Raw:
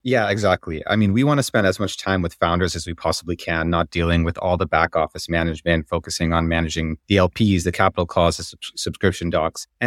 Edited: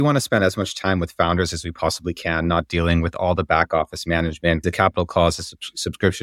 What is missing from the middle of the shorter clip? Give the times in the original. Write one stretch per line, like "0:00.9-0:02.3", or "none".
0:05.9-0:07.6